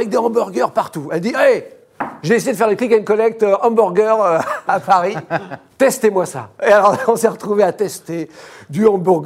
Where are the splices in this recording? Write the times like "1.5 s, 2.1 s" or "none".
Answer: none